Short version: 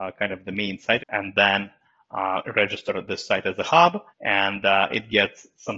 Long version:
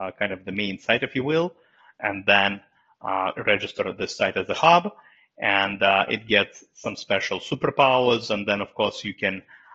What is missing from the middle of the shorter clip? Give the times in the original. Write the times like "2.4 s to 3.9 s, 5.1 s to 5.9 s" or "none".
1.0 s to 1.9 s, 5.0 s to 5.3 s